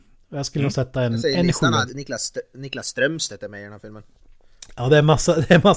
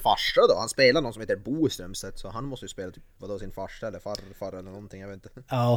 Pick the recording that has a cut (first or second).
first